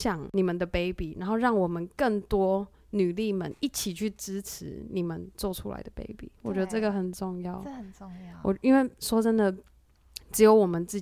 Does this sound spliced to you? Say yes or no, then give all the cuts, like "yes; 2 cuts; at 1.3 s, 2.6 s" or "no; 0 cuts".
no; 0 cuts